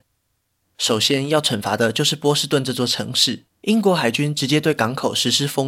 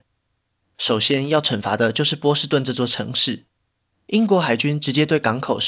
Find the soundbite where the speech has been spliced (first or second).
first